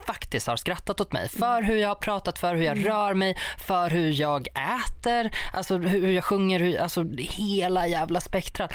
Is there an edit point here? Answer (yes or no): no